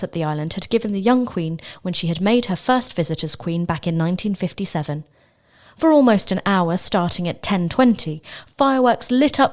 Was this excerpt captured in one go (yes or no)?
yes